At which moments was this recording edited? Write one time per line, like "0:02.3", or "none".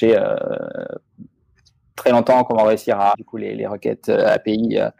0:03.1